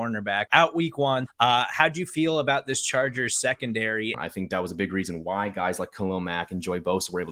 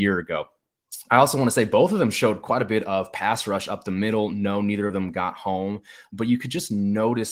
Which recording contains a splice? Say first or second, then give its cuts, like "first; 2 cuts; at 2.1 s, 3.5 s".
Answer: first; 2 cuts; at 1.3 s, 4.1 s